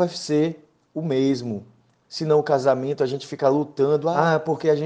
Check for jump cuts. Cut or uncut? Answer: cut